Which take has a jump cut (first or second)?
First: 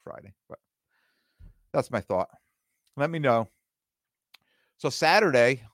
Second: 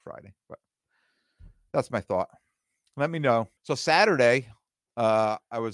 second